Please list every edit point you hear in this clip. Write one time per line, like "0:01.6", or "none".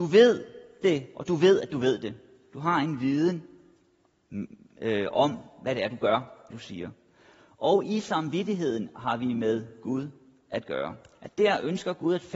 0:06.5